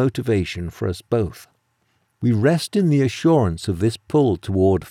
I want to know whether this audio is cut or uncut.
uncut